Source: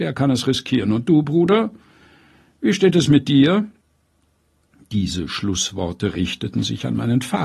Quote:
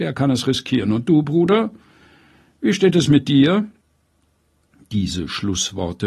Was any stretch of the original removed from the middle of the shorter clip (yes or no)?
no